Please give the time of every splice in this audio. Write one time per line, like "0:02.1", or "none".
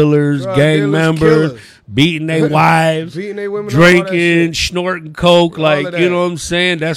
none